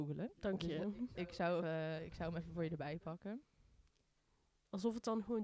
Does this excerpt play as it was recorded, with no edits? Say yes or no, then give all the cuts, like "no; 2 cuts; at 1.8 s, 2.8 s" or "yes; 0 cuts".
no; 1 cut; at 1.6 s